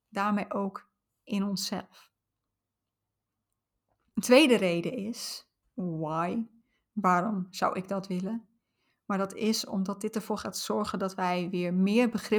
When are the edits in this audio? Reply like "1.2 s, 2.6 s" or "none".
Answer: 5.6 s